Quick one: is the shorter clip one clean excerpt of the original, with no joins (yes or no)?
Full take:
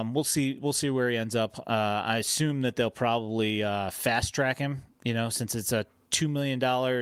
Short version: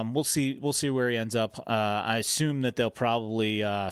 yes